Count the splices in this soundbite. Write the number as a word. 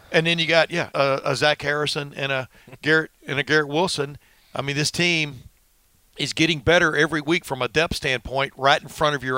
one